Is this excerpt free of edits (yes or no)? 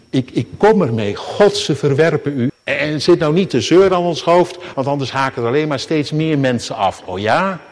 no